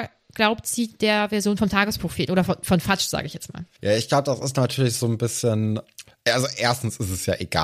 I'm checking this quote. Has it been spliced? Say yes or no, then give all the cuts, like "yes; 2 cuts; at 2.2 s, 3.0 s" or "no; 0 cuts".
no; 0 cuts